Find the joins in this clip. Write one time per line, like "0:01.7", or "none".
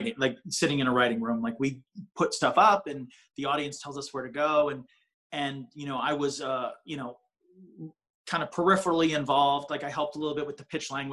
none